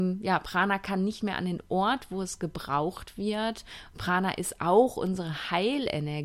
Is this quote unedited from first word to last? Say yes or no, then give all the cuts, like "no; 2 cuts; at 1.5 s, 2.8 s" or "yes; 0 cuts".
yes; 0 cuts